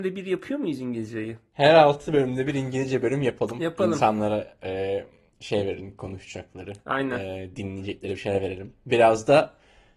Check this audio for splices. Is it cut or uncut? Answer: uncut